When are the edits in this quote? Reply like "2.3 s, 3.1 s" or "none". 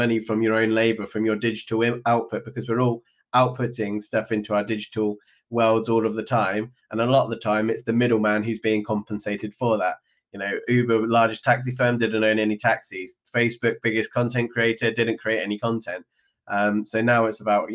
10.2 s